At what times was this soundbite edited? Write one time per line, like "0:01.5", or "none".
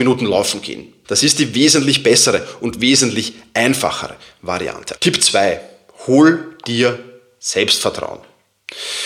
0:01.0
0:05.0